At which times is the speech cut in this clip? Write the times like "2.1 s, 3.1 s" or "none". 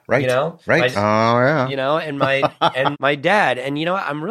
0.9 s, 2.9 s